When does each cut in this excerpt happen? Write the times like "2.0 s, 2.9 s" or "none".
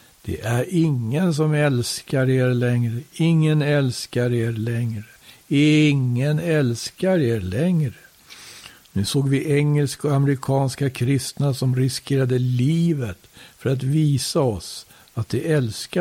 none